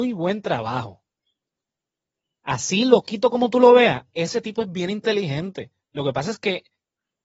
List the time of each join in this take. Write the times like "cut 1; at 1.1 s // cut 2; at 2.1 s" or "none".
none